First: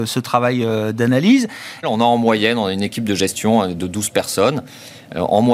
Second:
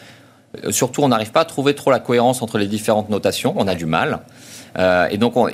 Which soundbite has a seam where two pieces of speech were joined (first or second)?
first